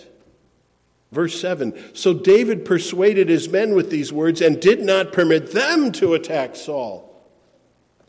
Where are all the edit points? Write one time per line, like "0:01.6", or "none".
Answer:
0:01.1